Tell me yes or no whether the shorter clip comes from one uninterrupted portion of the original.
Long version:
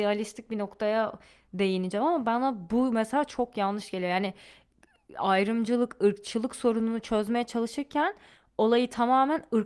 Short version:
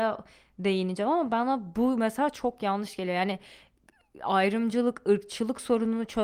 yes